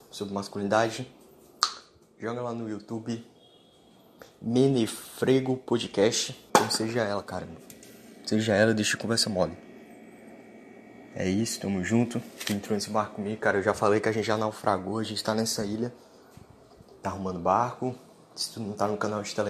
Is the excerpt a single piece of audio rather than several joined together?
no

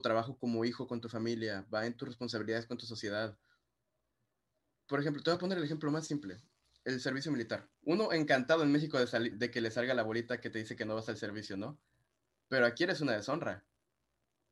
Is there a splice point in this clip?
yes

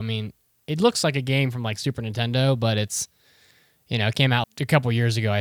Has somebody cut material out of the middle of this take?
yes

